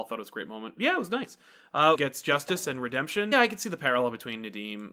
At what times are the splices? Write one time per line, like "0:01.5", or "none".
0:01.9
0:03.3